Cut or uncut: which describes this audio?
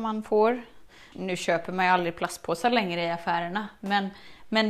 cut